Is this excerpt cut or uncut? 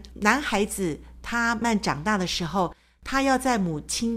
cut